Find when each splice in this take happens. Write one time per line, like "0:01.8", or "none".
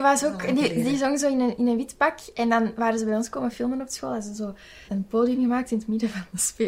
0:04.9